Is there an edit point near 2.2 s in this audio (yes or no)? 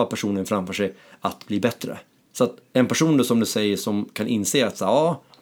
yes